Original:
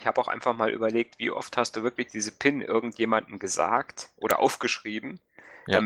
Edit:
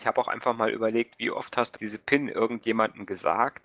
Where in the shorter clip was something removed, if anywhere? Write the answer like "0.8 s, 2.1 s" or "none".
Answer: 1.7 s